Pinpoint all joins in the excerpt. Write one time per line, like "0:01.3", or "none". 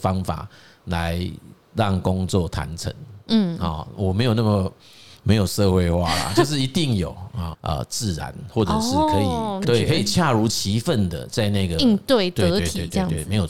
0:07.5
0:09.6